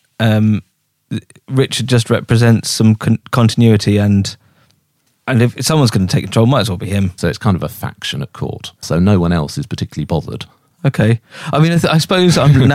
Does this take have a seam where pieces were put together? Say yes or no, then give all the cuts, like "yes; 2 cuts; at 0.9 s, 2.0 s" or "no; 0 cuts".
yes; 3 cuts; at 7.2 s, 8.8 s, 10.7 s